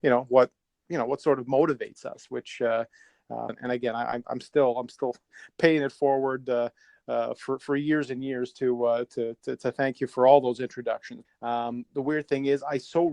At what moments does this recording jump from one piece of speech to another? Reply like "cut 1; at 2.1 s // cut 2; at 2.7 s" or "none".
cut 1; at 3.5 s // cut 2; at 11.2 s